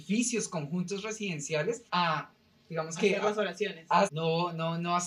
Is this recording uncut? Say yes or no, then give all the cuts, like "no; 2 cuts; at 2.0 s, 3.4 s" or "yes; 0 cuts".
no; 2 cuts; at 1.9 s, 4.1 s